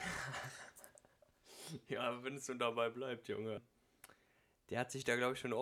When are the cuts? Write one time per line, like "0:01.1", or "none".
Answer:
0:03.6